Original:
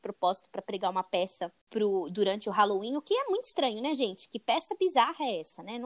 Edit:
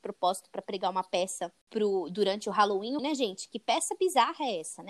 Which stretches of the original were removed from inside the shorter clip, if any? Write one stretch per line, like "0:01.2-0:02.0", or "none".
0:03.0-0:03.8

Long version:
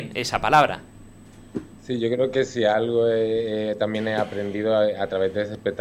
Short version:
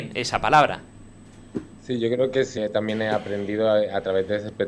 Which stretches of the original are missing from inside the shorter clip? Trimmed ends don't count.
0:02.6-0:03.6

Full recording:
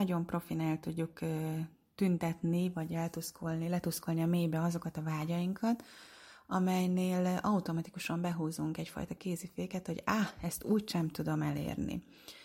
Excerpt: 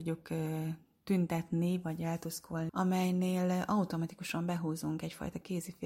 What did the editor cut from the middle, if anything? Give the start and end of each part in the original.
0:03.6-0:06.4

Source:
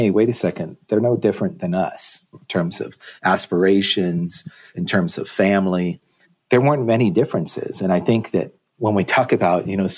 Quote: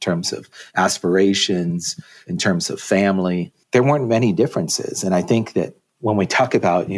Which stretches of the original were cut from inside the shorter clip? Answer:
0:06.1-0:06.4

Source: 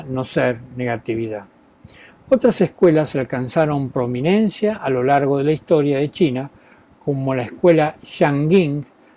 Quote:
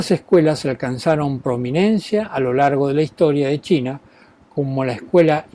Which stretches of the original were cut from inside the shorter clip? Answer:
none

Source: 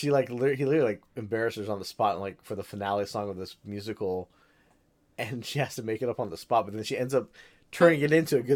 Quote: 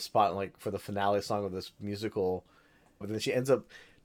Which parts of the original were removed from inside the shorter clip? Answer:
0:04.9-0:06.6

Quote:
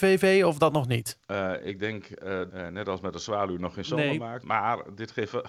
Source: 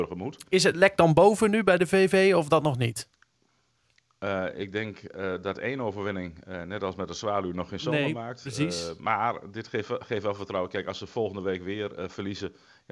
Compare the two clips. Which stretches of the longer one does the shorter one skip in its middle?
0:03.1-0:04.2
0:05.4-0:06.4
0:08.4-0:09.0

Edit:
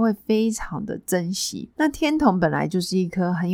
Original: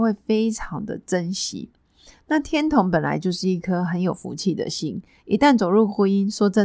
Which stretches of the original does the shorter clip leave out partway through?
0:01.7-0:02.2

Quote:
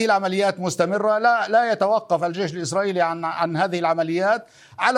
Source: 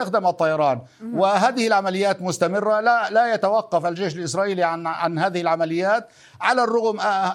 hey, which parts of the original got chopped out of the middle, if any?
none

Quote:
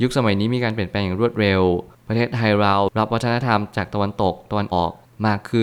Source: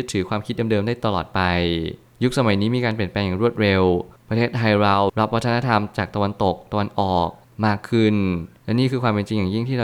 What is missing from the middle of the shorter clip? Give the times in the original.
0:06.9-0:07.1

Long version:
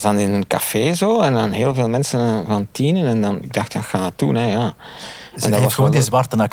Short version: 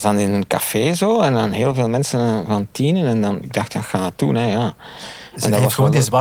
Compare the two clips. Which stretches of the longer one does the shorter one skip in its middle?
none

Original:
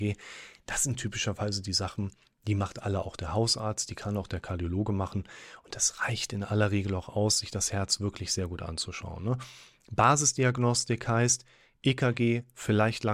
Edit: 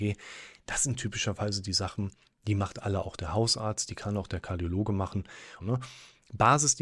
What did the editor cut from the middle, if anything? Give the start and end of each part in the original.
0:05.6-0:09.2

